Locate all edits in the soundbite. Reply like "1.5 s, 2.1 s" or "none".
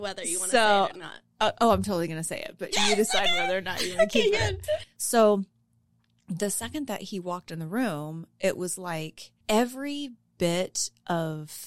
4.8 s, 9.4 s

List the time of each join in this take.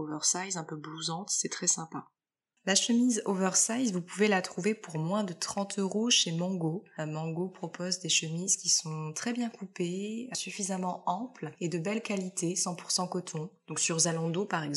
none

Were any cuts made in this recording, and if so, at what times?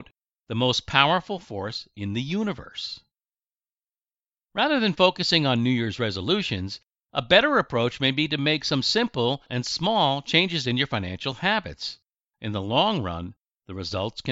none

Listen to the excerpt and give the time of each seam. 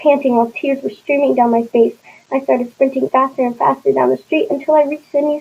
3.1 s

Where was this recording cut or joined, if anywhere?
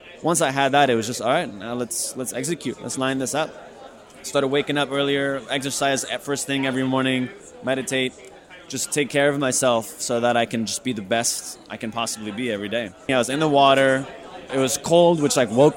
13.1 s, 14.5 s

